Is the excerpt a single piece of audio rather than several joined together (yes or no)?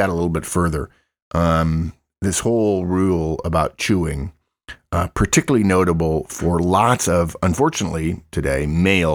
yes